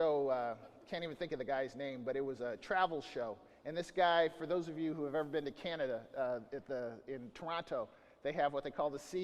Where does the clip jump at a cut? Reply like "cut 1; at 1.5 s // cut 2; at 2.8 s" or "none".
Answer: none